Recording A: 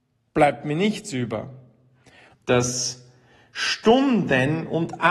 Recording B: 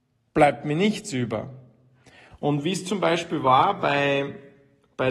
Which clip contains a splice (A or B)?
A